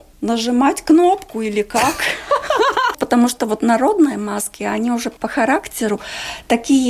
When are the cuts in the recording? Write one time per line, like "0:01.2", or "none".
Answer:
0:02.9